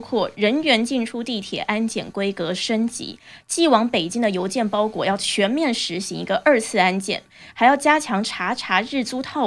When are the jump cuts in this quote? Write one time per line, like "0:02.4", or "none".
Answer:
none